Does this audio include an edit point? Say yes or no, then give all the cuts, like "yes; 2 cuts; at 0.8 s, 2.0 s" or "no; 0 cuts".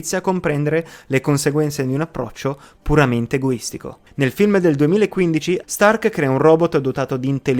yes; 1 cut; at 5.6 s